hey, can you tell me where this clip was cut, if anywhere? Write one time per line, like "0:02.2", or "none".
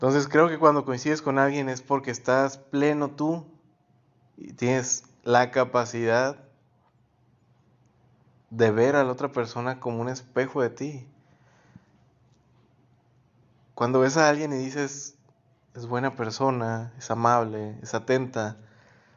none